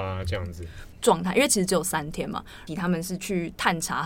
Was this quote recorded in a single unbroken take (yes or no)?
no